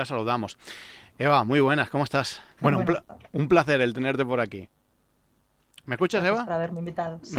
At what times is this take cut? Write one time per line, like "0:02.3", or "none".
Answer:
0:02.6